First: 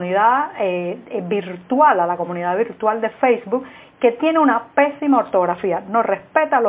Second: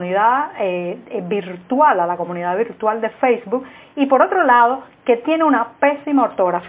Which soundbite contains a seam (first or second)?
first